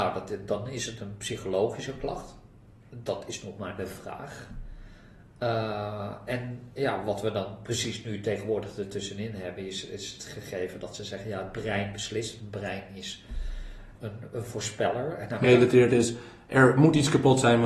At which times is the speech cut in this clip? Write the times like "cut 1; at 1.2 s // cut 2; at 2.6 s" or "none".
cut 1; at 14.0 s // cut 2; at 15.4 s